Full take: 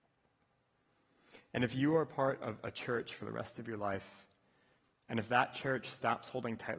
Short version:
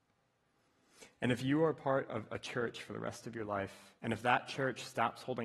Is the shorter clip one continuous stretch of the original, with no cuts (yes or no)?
no